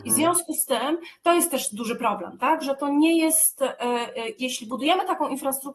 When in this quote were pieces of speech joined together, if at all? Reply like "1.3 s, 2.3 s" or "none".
4.4 s